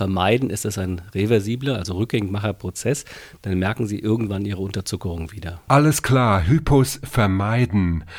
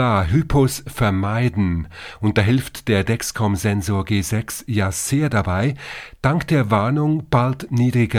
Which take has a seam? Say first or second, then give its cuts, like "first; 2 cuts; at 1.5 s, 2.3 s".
first; 1 cut; at 5.7 s